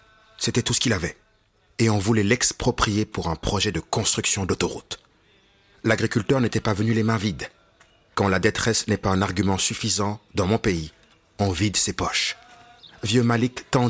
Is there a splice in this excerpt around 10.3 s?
no; 0 cuts

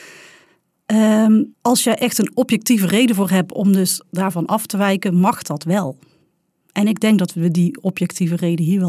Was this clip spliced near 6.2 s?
no; 0 cuts

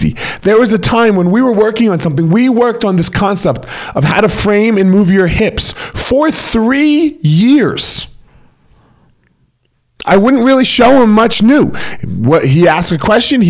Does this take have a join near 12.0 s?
no; 0 cuts

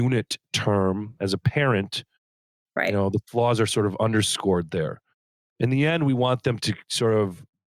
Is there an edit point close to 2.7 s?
yes; 1 cut; at 2.7 s

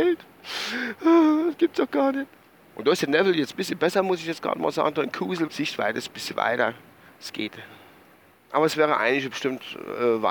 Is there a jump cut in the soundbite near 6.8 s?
no; 3 cuts; at 2.7 s, 5.5 s, 8.3 s

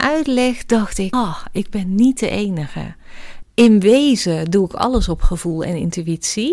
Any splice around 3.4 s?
yes; 2 cuts; at 1.1 s, 3.4 s

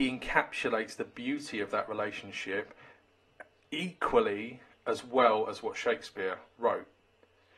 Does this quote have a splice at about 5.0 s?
no; 0 cuts

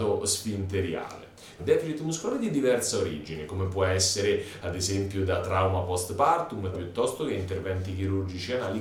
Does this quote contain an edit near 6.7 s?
yes; 2 cuts; at 1.6 s, 6.7 s

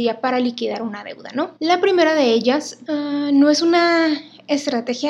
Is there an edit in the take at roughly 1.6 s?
yes; 2 cuts; at 1.6 s, 2.9 s

